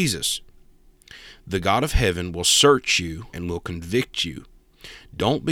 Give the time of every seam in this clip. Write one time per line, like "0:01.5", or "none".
0:03.3

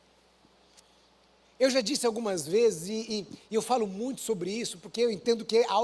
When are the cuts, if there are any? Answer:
none

